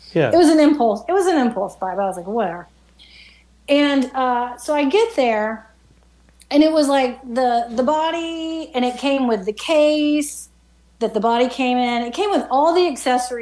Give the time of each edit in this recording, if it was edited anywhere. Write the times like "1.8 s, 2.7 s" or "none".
none